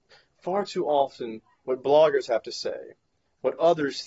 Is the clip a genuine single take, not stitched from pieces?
no; 1 cut; at 1.6 s

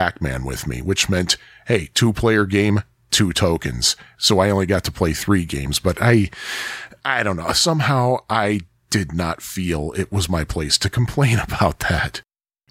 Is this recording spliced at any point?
no; 0 cuts

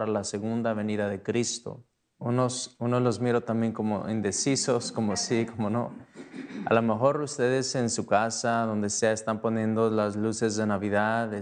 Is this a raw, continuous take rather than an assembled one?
no; 1 cut; at 2.0 s

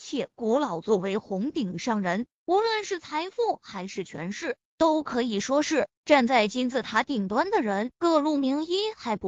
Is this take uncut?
no; 1 cut; at 8.0 s

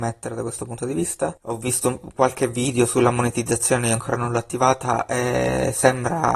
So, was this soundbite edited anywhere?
yes; 1 cut; at 1.4 s

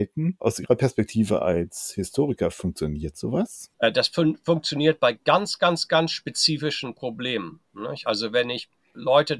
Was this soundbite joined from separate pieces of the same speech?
no; 0 cuts

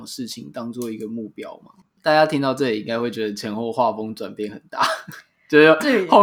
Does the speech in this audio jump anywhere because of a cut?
yes; 1 cut; at 1.8 s

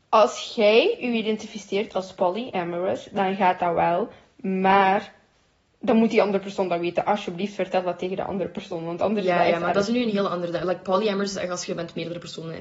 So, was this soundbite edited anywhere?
no; 0 cuts

